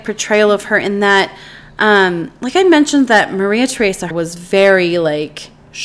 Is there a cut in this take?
yes; 1 cut; at 4.1 s

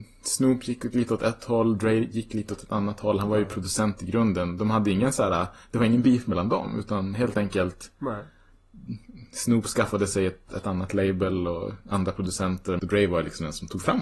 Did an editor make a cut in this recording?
yes; 2 cuts; at 10.5 s, 12.8 s

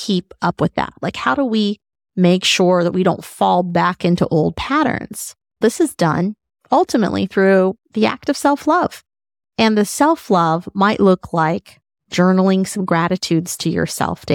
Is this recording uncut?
yes; 0 cuts

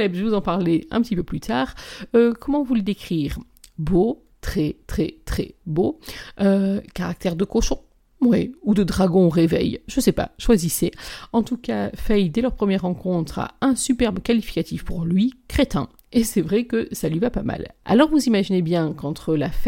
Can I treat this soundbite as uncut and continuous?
no; 1 cut; at 4.8 s

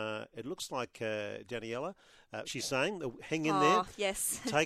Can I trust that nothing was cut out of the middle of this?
no; 1 cut; at 2.4 s

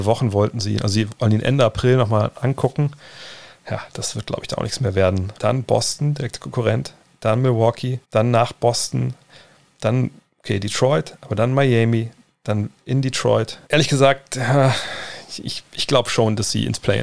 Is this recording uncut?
no; 3 cuts; at 5.4 s, 8.0 s, 13.7 s

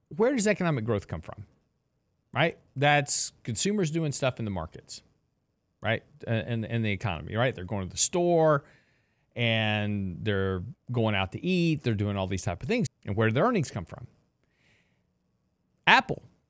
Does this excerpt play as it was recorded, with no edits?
no; 2 cuts; at 10.7 s, 12.9 s

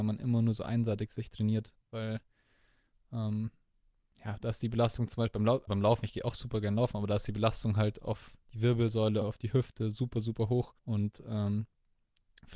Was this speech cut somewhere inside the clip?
yes; 3 cuts; at 5.7 s, 9.2 s, 10.8 s

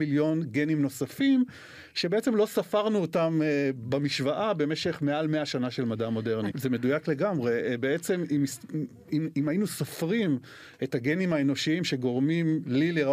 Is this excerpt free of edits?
no; 1 cut; at 6.5 s

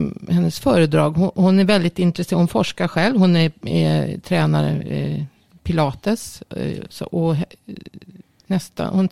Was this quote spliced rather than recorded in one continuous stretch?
no; 0 cuts

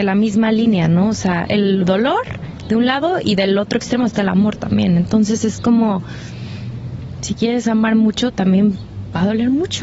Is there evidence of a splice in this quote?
yes; 1 cut; at 1.5 s

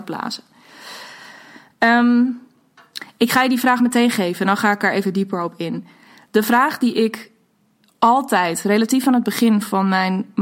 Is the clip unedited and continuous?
yes; 0 cuts

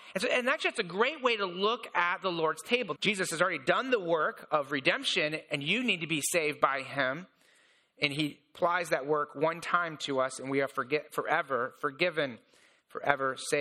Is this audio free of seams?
no; 1 cut; at 3.0 s

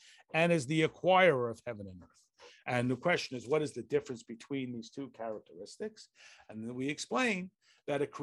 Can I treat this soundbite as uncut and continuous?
yes; 0 cuts

